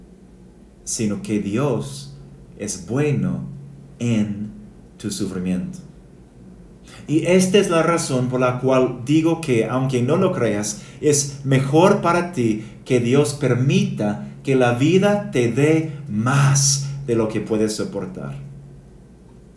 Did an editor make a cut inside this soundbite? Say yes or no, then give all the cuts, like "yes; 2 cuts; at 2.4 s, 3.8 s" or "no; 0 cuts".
no; 0 cuts